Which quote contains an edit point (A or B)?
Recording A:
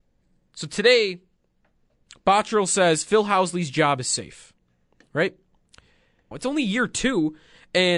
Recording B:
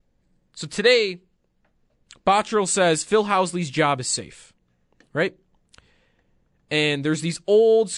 A